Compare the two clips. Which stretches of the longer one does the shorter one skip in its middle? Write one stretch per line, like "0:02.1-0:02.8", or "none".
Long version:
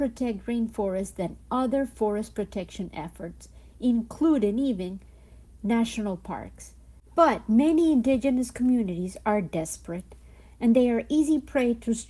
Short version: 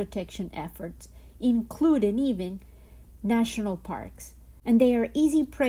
0:07.0-0:10.6